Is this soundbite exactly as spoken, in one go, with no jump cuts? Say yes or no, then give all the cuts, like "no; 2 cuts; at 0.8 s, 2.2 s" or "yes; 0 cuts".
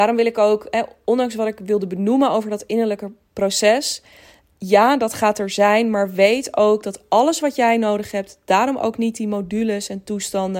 yes; 0 cuts